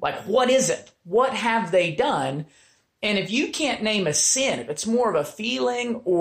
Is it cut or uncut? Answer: uncut